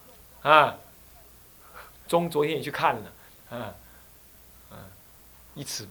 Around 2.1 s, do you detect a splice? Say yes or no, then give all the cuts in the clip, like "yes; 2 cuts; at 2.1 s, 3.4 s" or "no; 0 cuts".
yes; 2 cuts; at 2.1 s, 3.3 s